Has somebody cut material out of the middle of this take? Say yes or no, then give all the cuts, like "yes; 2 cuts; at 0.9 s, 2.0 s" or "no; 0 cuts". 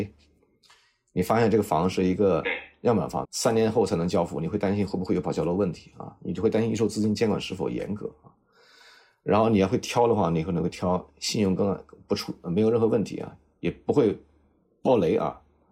yes; 1 cut; at 3.2 s